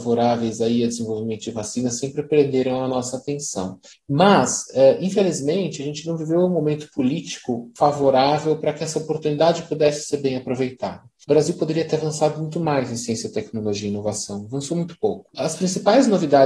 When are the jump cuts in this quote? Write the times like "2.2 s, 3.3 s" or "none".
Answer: none